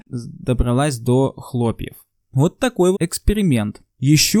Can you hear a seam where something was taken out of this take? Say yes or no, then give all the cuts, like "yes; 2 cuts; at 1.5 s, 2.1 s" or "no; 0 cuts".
yes; 1 cut; at 2.9 s